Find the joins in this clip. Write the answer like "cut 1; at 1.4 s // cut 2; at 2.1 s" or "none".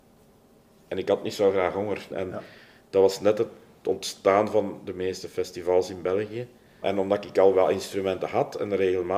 cut 1; at 2.1 s // cut 2; at 6.8 s